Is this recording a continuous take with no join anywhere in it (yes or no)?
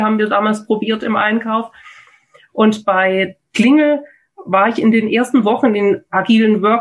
yes